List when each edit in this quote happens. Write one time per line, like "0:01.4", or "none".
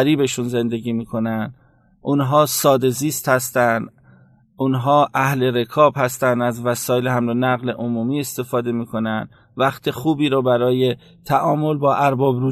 none